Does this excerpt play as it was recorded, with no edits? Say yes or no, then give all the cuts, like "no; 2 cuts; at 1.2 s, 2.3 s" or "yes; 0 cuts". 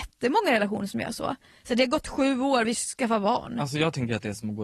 no; 1 cut; at 2.6 s